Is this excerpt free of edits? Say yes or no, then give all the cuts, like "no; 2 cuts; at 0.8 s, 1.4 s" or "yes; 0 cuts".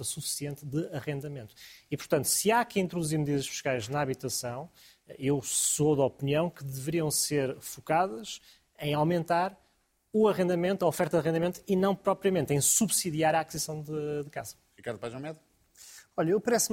yes; 0 cuts